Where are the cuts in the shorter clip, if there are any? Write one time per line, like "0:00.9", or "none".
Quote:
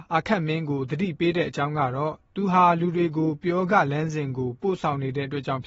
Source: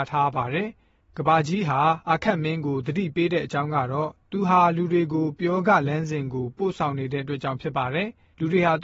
none